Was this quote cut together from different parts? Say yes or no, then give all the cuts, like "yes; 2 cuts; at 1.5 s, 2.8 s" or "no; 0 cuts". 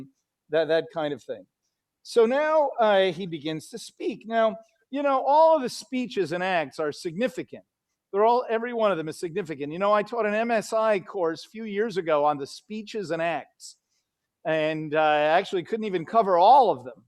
no; 0 cuts